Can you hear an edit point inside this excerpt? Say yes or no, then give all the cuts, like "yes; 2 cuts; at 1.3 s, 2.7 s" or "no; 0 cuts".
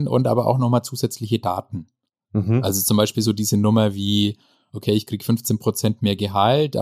no; 0 cuts